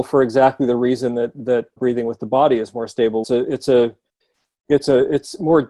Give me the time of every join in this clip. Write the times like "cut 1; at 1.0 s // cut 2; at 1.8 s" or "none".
cut 1; at 1.8 s // cut 2; at 3.2 s